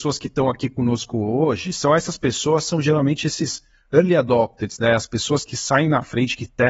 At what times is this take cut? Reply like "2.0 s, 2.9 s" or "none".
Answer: none